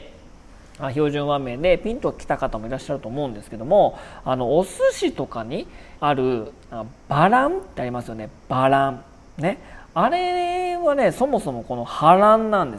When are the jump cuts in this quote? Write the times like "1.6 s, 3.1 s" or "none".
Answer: 6.0 s